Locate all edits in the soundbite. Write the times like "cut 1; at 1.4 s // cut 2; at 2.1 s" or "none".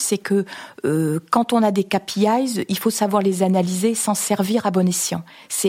none